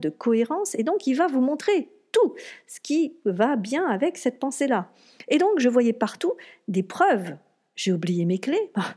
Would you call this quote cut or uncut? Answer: uncut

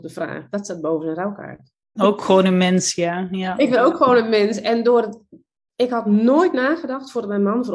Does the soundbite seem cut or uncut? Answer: cut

